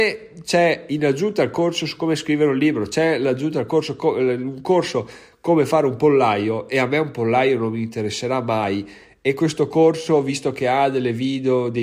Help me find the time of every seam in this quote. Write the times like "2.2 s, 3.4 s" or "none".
none